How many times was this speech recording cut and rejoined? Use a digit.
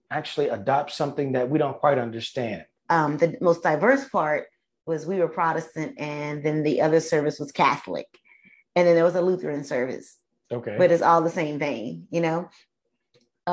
1